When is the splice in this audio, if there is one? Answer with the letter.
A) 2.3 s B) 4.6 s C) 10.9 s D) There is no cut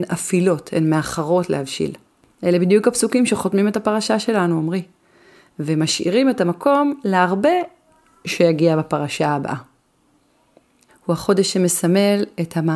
C